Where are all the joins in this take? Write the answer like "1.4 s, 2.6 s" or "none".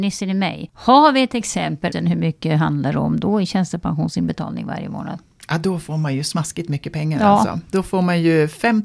1.9 s

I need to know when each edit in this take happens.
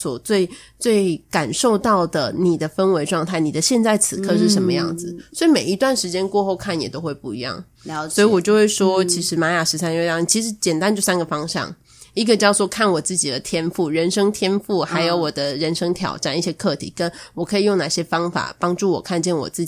none

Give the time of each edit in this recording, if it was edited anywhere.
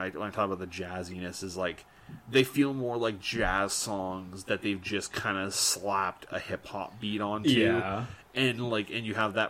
none

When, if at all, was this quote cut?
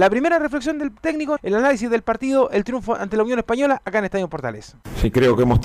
1.4 s

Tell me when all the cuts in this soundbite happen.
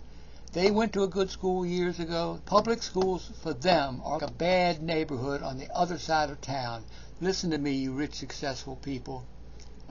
2.4 s, 4.2 s, 7.2 s

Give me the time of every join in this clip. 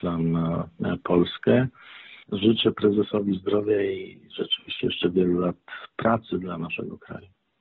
2.2 s

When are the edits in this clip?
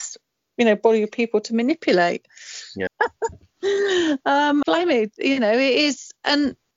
2.9 s, 4.6 s

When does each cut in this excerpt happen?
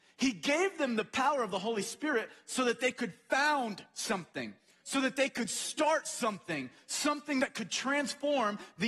none

